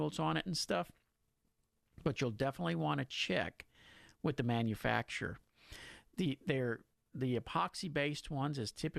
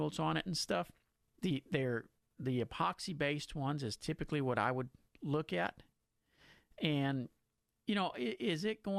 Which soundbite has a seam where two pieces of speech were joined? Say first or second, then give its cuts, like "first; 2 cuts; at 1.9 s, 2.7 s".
second; 1 cut; at 1.3 s